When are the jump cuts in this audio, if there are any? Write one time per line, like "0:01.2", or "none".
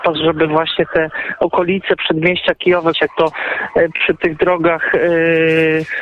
0:02.9